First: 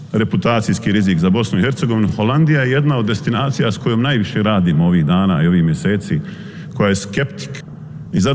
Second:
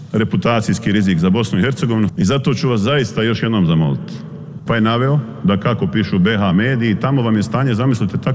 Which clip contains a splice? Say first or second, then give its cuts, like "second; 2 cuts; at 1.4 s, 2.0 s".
second; 2 cuts; at 2.1 s, 4.6 s